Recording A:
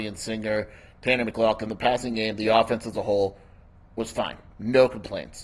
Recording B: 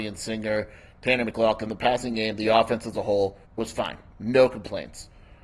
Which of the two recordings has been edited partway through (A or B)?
B